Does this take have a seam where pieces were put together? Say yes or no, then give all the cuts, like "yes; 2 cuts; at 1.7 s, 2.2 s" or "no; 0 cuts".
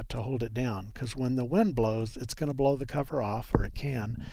no; 0 cuts